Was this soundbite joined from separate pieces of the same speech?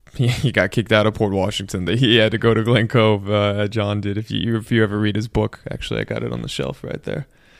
no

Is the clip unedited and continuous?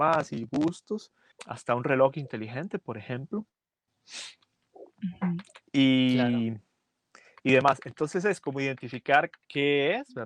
no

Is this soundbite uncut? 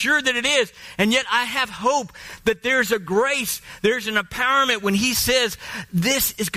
yes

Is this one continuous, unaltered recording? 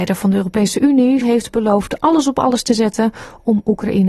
no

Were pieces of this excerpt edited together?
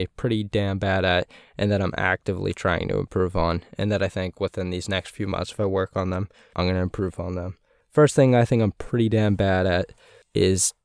yes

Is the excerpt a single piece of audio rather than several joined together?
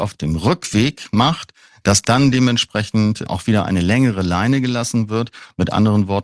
yes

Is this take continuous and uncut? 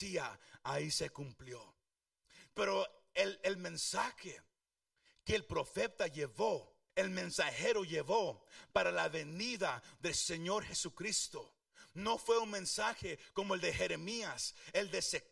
no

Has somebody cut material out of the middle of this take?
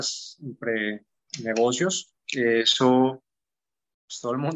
yes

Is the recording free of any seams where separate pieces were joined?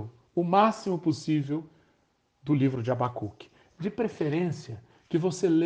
yes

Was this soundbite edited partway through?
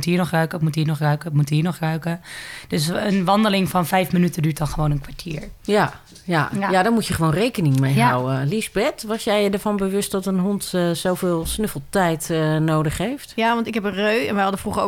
no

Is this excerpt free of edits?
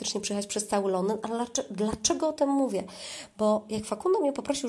yes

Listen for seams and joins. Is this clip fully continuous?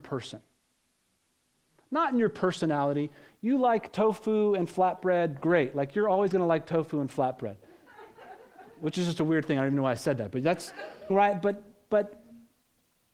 no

